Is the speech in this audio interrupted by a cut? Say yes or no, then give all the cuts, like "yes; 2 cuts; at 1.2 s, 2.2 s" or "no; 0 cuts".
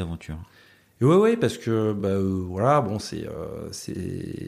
no; 0 cuts